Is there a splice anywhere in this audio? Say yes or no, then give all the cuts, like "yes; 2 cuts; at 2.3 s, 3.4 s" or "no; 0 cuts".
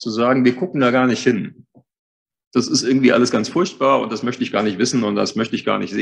no; 0 cuts